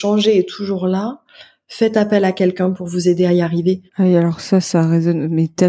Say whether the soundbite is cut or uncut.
cut